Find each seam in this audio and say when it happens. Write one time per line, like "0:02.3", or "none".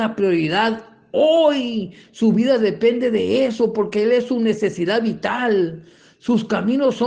none